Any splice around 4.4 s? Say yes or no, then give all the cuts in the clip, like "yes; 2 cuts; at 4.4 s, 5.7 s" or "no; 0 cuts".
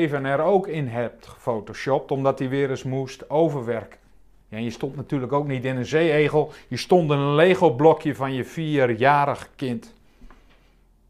yes; 1 cut; at 4.4 s